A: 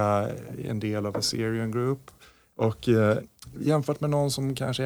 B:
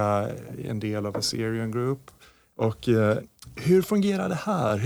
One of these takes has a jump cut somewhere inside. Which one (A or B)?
A